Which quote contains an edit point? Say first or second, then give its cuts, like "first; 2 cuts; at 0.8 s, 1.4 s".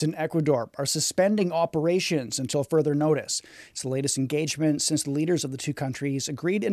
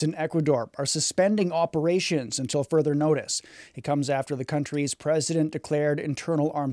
first; 1 cut; at 3.7 s